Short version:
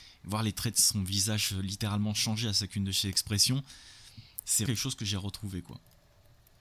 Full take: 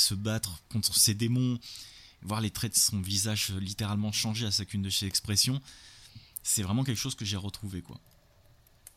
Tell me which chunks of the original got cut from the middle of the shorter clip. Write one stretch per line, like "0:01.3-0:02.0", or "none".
0:06.6-0:06.9